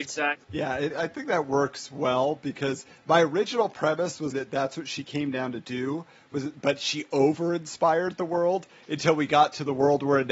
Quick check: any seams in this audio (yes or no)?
yes